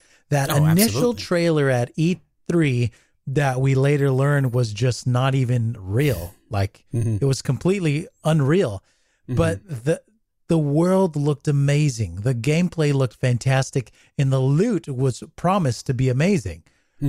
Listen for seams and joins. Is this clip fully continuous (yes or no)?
yes